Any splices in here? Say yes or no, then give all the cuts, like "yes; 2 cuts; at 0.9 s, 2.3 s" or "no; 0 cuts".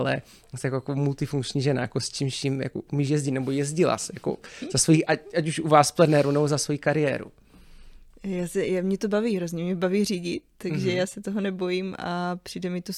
no; 0 cuts